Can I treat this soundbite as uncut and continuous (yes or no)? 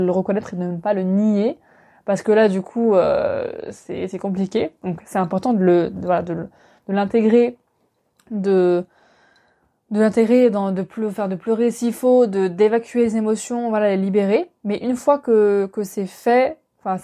yes